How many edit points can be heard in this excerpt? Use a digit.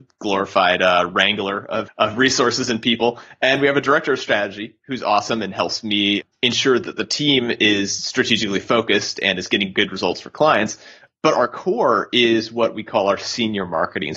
1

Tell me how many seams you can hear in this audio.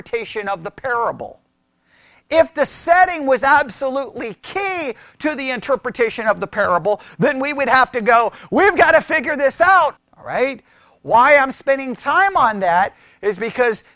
1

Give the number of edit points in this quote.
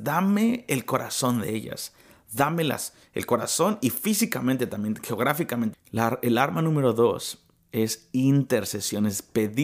1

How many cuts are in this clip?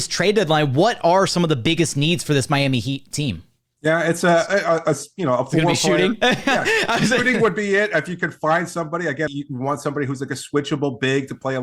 1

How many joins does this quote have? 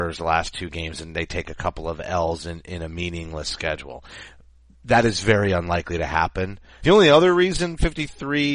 1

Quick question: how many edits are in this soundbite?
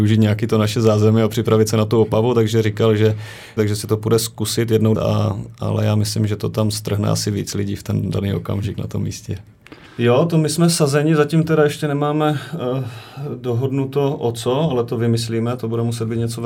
3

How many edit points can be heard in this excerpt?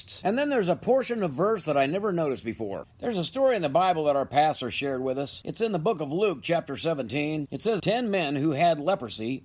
2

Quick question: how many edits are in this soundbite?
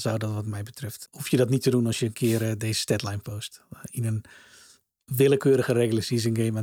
1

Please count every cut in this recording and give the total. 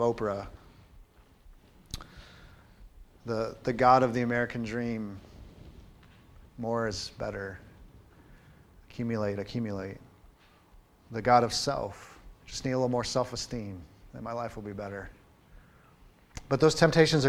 1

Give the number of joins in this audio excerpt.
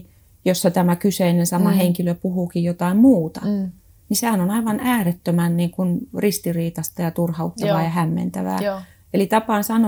0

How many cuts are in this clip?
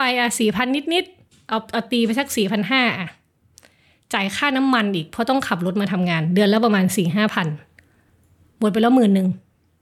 0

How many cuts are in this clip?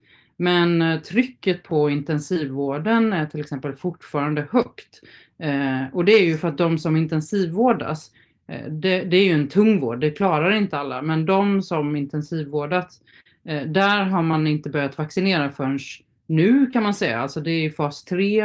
0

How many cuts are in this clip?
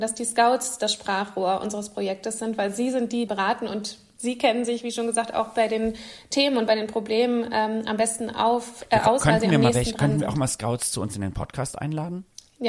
1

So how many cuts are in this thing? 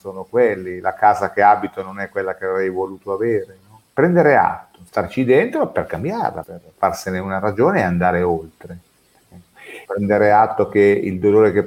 3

